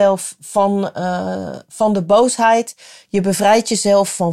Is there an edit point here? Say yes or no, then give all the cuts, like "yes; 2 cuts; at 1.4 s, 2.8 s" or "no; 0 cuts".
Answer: no; 0 cuts